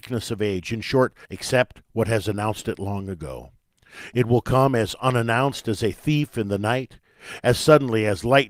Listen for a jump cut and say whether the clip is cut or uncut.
cut